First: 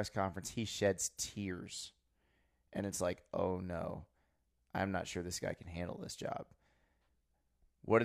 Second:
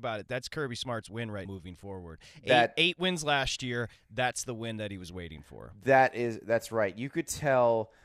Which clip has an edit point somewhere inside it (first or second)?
second